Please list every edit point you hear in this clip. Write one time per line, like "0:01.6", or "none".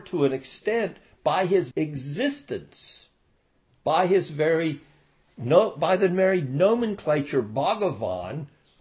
0:01.7